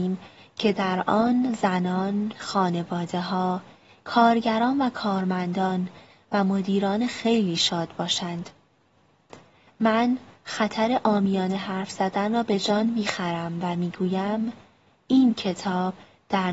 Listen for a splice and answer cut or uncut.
cut